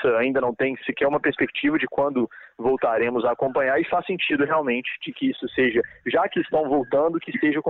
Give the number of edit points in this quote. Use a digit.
0